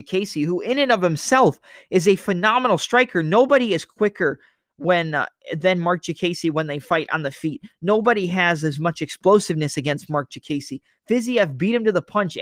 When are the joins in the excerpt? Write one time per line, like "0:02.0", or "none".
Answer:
none